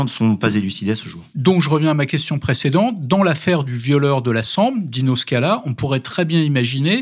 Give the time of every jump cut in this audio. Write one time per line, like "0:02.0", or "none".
none